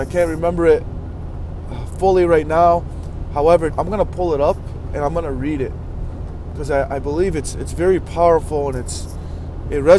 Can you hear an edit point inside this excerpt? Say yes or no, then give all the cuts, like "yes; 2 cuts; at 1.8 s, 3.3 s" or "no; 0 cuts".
yes; 1 cut; at 3.7 s